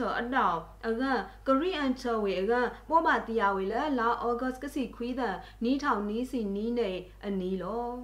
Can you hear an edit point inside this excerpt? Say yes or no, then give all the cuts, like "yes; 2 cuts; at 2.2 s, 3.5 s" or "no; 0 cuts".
no; 0 cuts